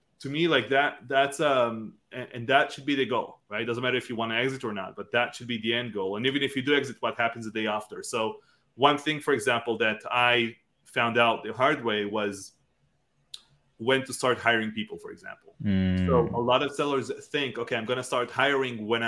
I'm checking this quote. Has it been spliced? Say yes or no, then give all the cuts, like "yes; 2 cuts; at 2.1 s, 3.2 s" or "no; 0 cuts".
no; 0 cuts